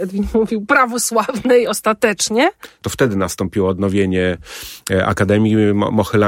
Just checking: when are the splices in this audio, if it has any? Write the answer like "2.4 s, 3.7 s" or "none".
2.7 s